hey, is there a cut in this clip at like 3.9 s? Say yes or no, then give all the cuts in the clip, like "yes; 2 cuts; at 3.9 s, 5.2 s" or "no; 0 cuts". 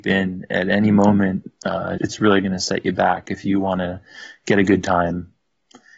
no; 1 cut; at 2.0 s